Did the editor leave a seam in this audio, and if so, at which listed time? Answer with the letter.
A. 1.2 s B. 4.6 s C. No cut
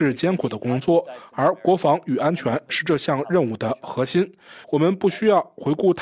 B